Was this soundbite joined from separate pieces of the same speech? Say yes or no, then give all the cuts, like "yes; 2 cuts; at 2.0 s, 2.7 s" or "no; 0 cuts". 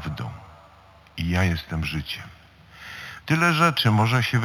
yes; 1 cut; at 3.2 s